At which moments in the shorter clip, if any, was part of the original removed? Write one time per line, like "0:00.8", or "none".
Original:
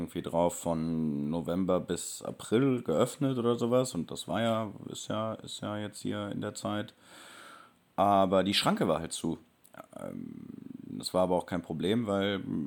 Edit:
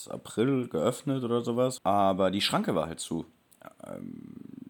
0:01.8